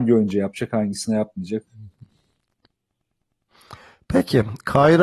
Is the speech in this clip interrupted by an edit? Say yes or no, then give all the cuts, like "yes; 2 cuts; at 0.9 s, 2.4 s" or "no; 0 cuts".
no; 0 cuts